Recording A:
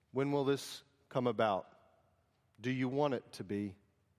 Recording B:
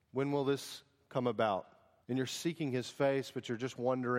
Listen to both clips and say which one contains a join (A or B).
B